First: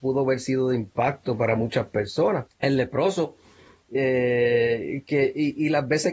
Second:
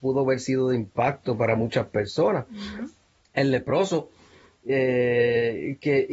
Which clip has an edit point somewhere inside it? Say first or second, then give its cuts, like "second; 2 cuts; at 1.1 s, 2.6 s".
first; 1 cut; at 2.5 s